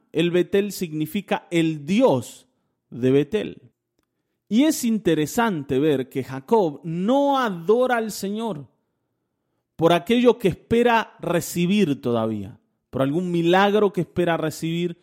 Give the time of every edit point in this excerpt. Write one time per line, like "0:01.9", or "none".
none